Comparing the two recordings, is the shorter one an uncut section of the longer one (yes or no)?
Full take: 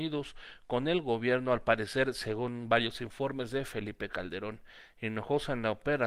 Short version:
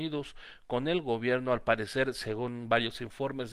yes